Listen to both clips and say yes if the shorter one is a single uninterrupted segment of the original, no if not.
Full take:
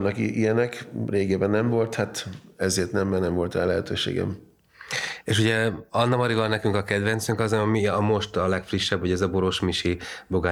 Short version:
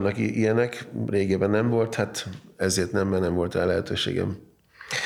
yes